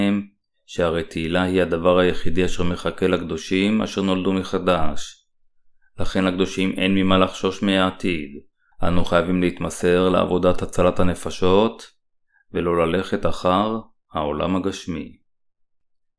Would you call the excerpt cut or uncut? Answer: cut